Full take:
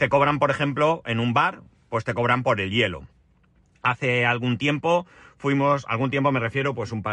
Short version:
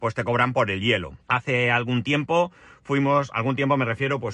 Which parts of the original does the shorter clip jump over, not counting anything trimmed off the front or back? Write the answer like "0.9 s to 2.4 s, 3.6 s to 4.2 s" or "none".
3.1 s to 3.8 s